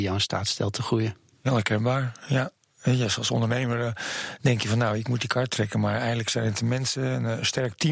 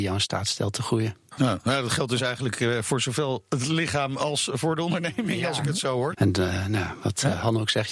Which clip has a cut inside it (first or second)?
second